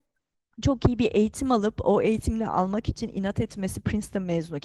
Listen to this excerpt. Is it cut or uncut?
uncut